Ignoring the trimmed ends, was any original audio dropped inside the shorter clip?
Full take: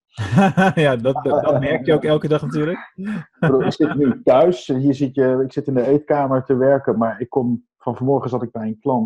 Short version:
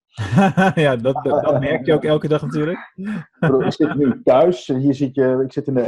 no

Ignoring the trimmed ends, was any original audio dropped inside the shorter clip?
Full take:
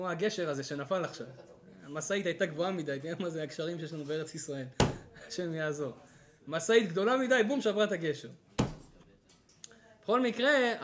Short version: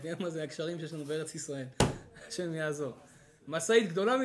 no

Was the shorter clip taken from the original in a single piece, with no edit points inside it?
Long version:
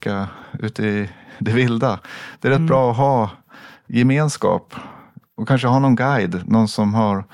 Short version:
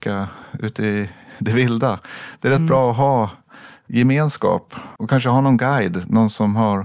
no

